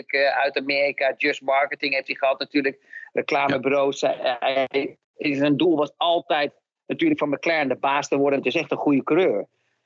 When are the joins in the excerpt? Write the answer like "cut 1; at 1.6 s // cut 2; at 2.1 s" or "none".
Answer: cut 1; at 5.0 s // cut 2; at 8.4 s